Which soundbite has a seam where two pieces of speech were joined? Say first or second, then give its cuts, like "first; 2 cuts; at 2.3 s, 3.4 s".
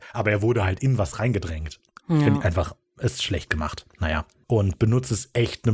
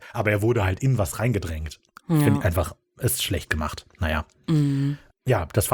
first; 1 cut; at 4.4 s